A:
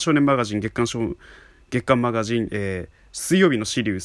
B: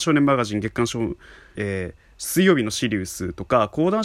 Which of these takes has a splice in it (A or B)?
B